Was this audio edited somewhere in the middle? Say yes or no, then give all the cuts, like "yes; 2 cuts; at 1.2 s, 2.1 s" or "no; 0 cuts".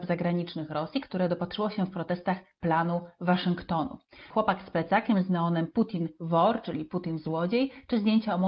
yes; 1 cut; at 4.3 s